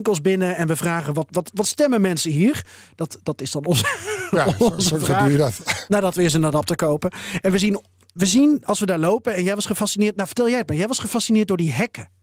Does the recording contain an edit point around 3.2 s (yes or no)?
no